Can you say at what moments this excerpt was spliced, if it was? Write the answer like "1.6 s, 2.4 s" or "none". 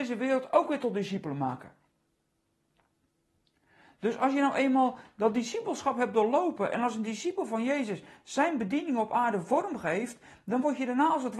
none

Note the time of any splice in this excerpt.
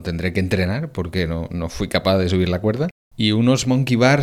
none

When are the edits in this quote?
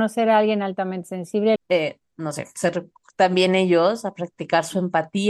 1.6 s

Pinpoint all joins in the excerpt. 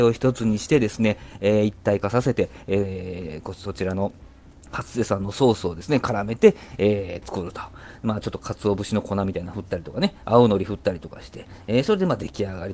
none

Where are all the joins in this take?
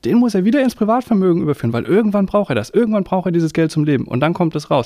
none

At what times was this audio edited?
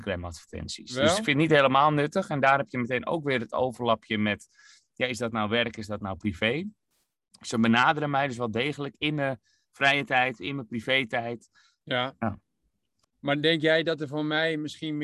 11.8 s, 13.0 s

